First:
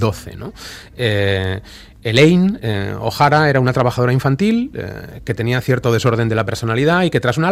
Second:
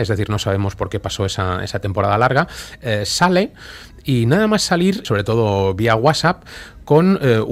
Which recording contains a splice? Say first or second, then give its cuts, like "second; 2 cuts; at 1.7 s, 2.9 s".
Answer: second; 1 cut; at 5.0 s